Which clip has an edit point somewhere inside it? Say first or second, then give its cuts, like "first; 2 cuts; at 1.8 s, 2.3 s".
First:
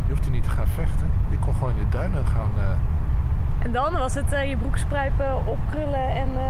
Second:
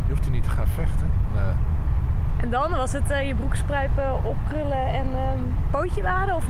second; 1 cut; at 1.3 s